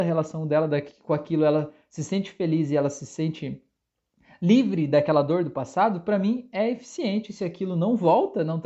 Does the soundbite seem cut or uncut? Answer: uncut